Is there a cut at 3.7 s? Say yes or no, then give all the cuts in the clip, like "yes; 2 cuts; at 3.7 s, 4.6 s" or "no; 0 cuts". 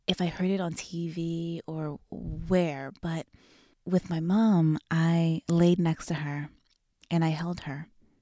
yes; 1 cut; at 3.7 s